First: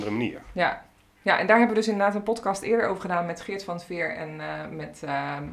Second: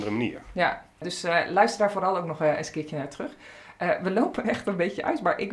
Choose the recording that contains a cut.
second; 1 cut; at 1.0 s

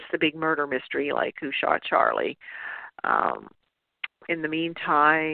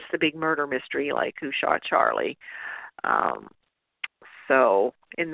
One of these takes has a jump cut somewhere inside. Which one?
first; 1 cut; at 4.3 s

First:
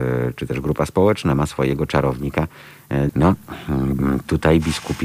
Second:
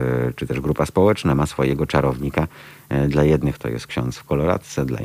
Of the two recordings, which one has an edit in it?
first; 1 cut; at 3.1 s

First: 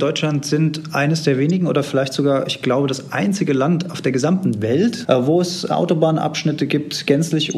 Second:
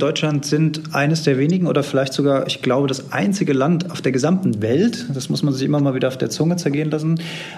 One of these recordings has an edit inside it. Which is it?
first; 1 cut; at 5.0 s

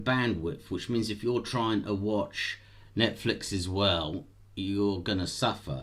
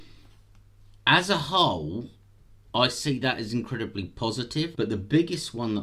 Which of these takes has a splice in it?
second; 1 cut; at 4.7 s

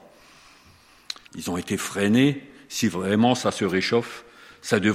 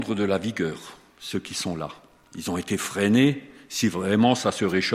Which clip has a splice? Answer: first; 1 cut; at 1.3 s

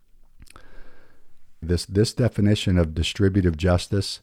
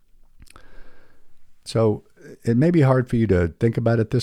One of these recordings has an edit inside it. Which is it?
first; 1 cut; at 1.6 s

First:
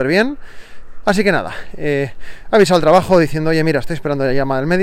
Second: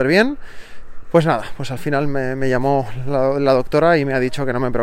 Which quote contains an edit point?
first; 1 cut; at 1.0 s

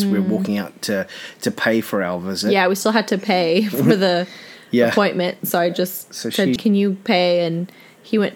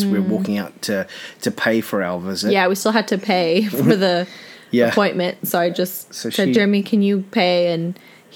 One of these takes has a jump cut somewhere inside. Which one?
first; 1 cut; at 6.6 s

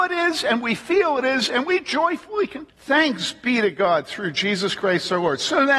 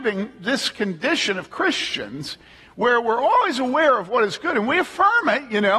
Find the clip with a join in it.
first; 1 cut; at 2.7 s

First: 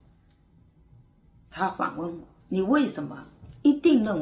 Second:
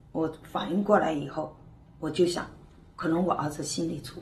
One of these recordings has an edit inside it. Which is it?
first; 1 cut; at 2.4 s

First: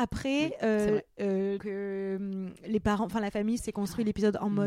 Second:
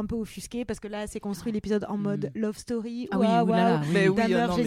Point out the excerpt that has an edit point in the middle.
first; 2 cuts; at 1.6 s, 3.6 s

